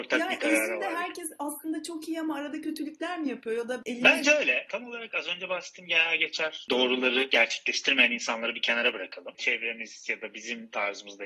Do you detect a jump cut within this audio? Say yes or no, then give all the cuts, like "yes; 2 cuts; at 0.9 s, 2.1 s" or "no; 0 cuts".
no; 0 cuts